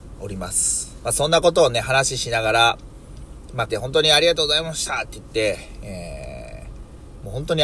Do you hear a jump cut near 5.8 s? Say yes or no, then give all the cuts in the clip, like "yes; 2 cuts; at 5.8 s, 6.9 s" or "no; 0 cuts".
no; 2 cuts; at 1.0 s, 3.7 s